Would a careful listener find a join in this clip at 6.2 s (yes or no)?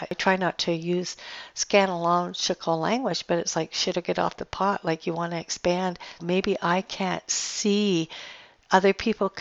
yes